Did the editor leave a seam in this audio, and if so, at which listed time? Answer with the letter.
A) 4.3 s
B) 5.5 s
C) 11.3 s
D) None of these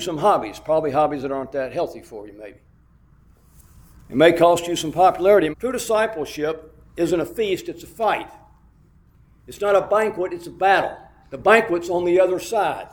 B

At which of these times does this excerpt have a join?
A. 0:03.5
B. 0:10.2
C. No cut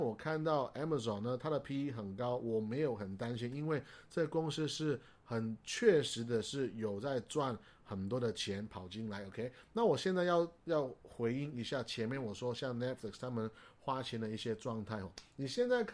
C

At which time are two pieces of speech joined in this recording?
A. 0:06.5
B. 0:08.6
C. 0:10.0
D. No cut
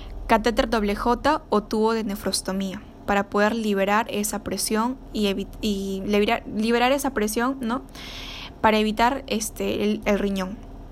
C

